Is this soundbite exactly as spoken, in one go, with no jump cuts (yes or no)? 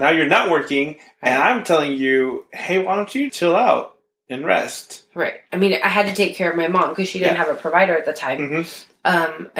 no